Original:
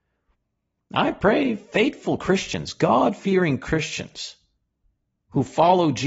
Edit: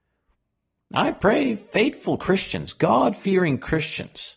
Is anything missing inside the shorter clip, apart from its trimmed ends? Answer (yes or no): no